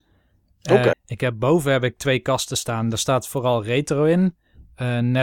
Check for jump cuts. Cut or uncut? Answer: cut